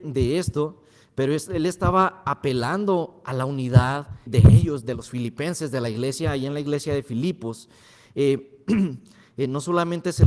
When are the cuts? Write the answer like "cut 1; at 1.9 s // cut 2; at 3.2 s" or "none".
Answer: cut 1; at 4.3 s